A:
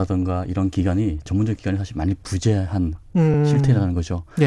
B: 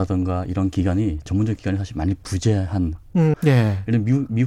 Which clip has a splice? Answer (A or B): B